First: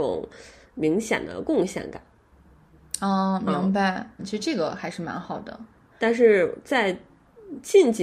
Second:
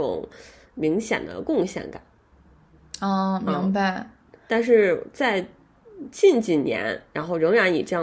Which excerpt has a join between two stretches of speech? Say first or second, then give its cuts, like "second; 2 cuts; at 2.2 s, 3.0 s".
first; 2 cuts; at 4.2 s, 5.9 s